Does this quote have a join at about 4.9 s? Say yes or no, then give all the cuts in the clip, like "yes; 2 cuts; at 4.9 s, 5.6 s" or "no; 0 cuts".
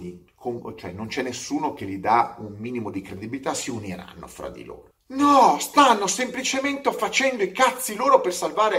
yes; 1 cut; at 4.9 s